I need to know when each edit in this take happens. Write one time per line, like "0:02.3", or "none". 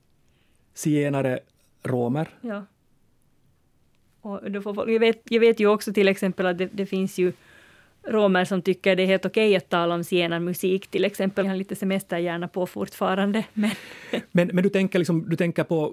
0:11.4